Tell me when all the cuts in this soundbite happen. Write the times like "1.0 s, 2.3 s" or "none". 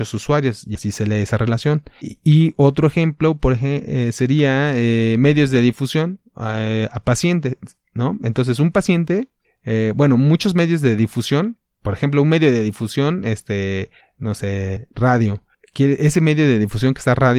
none